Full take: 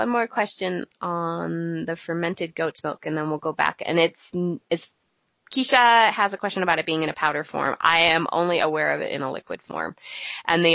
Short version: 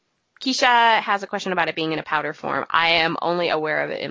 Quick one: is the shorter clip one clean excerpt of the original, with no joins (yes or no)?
yes